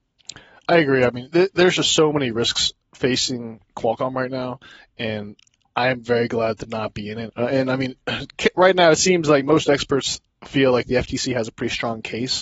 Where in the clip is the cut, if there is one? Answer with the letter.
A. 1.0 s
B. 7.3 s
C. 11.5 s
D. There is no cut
B